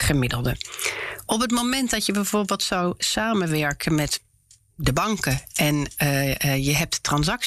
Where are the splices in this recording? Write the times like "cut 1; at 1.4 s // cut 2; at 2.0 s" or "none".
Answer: none